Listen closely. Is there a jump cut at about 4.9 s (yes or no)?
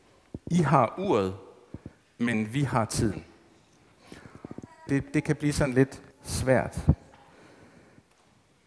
yes